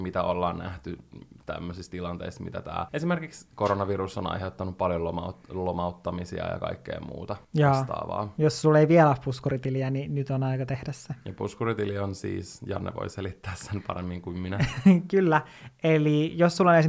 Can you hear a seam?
no; 0 cuts

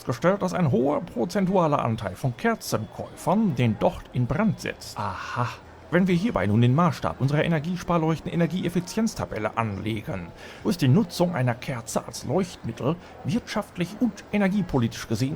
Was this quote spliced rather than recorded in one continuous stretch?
yes; 1 cut; at 10.6 s

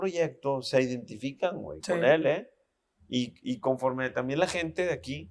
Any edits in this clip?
no; 0 cuts

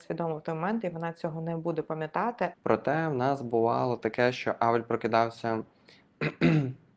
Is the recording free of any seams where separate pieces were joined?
no; 1 cut; at 2.5 s

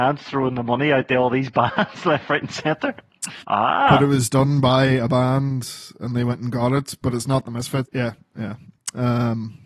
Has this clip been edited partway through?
yes; 2 cuts; at 3.4 s, 7.8 s

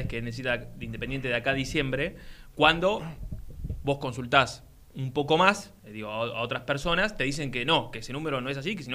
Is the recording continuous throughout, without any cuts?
no; 1 cut; at 5.8 s

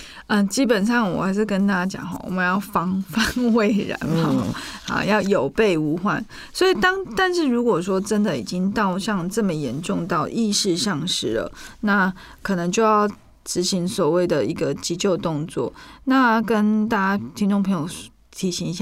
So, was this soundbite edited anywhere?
no; 0 cuts

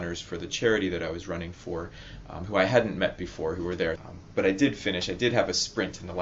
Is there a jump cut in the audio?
yes; 1 cut; at 4.0 s

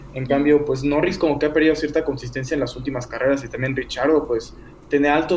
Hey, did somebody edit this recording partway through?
no; 0 cuts

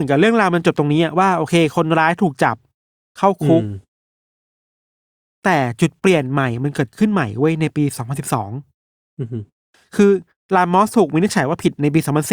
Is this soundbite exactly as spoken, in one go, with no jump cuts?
yes; 0 cuts

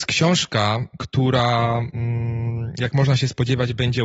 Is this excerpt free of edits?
yes; 0 cuts

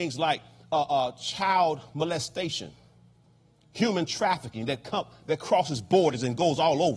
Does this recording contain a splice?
no; 0 cuts

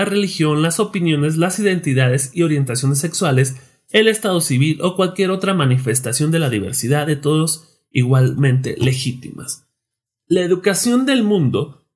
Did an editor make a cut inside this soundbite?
no; 0 cuts

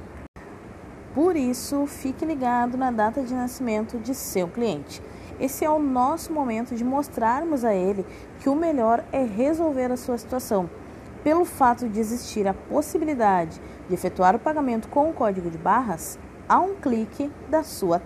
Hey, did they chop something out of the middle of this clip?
no; 0 cuts

